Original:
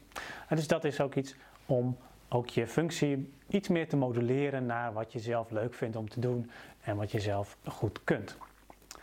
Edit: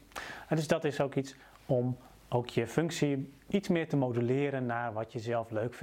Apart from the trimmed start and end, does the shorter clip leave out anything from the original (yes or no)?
no